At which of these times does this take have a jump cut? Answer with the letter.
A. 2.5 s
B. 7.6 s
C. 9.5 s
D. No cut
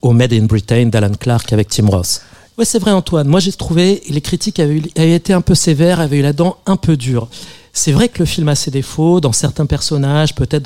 A